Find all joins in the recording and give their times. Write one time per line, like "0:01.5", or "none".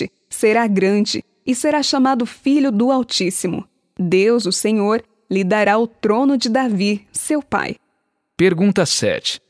none